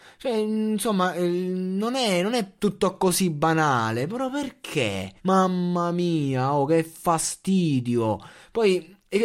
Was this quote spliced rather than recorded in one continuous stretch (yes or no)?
yes